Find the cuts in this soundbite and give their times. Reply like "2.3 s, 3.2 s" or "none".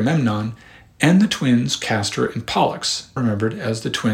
3.2 s